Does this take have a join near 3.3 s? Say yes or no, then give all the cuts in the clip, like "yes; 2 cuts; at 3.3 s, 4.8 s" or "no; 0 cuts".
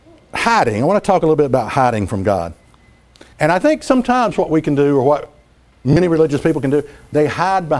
yes; 1 cut; at 3.3 s